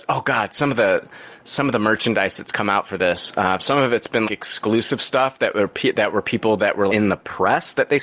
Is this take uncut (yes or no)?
no